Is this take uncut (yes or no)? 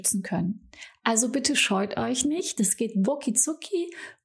no